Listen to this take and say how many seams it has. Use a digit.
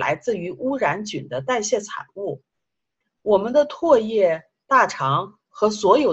1